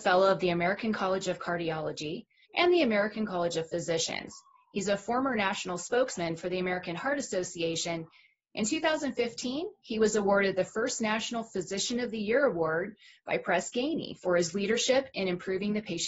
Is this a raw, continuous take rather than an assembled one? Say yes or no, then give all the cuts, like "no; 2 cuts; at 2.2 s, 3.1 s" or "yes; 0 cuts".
no; 1 cut; at 2.4 s